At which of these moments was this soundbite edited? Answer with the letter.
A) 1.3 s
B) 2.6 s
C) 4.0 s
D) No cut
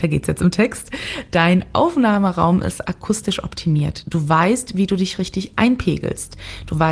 D